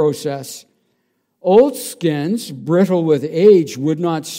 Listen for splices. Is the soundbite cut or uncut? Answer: uncut